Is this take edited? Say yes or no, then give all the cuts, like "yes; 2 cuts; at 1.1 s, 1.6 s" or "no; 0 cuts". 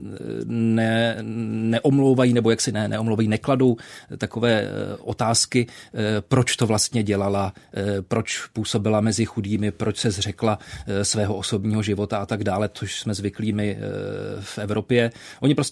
no; 0 cuts